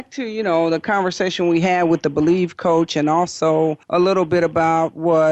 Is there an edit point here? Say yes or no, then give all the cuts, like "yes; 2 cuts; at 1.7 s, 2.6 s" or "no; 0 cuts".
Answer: yes; 1 cut; at 3.8 s